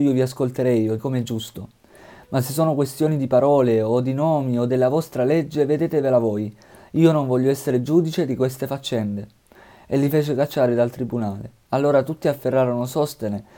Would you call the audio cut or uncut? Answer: cut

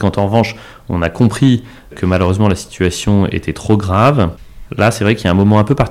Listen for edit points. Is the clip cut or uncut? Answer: cut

